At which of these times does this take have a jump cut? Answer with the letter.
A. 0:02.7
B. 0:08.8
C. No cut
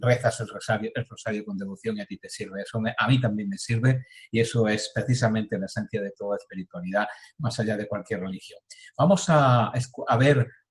C